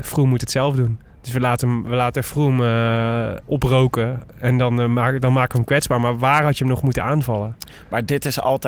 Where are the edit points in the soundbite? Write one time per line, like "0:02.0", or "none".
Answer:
0:03.5